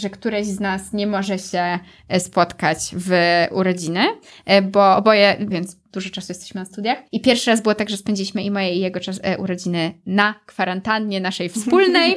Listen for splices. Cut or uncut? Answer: cut